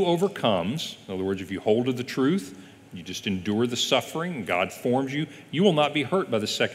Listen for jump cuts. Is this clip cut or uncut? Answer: uncut